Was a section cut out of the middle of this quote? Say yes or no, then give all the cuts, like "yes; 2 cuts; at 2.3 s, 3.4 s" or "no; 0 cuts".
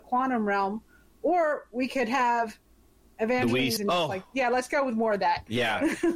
yes; 1 cut; at 3.8 s